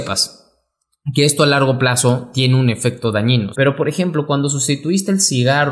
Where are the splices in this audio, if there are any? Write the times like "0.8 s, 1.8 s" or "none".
3.5 s